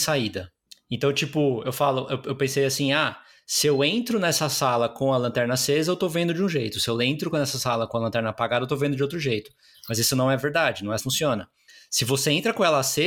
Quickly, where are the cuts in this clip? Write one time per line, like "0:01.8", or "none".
0:11.0